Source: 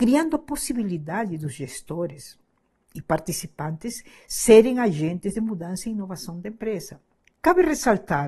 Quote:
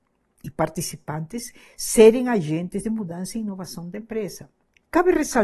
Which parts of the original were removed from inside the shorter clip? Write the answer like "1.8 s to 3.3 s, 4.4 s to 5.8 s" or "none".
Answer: none